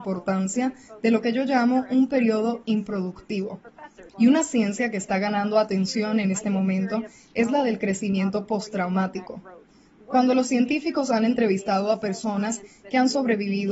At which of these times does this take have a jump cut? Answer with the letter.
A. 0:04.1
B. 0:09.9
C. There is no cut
A